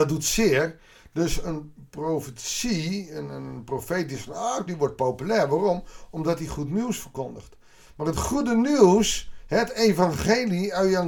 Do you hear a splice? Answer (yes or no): yes